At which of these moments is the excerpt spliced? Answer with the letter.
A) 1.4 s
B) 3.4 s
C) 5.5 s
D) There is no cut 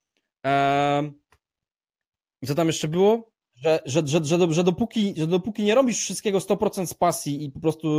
B